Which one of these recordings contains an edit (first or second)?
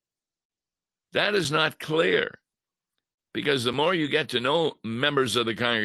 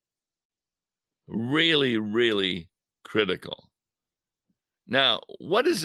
second